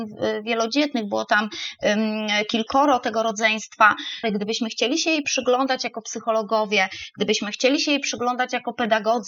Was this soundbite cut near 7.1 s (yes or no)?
no